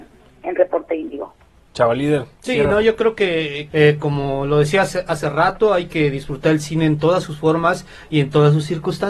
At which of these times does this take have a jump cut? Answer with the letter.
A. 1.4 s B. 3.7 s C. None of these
B